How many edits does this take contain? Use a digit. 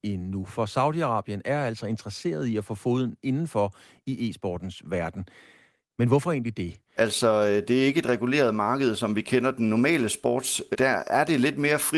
2